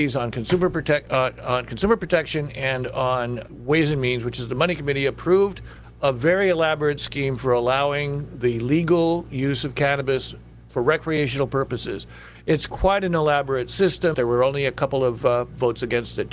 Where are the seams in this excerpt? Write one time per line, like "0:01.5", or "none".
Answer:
0:03.5
0:14.1